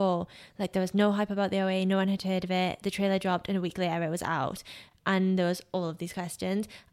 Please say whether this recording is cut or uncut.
uncut